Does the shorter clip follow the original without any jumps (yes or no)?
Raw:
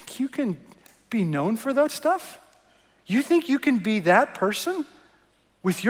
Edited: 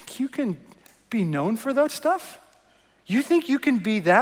yes